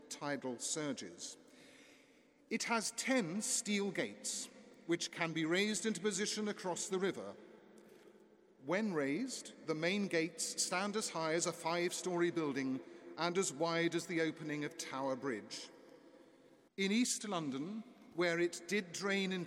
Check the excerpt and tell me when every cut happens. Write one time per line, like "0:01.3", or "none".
0:16.7
0:18.1